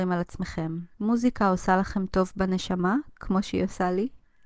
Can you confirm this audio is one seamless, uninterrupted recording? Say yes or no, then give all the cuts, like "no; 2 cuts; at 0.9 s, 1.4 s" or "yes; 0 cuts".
no; 1 cut; at 0.9 s